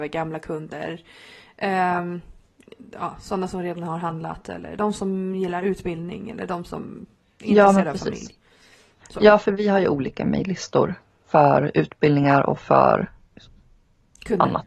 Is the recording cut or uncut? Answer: uncut